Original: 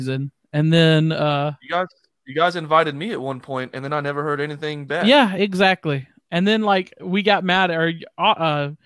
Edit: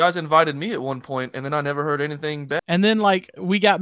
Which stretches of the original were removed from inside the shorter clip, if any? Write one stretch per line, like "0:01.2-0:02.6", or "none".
0:05.0-0:06.2